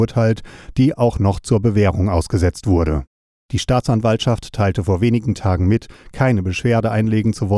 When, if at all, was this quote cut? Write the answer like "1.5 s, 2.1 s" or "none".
none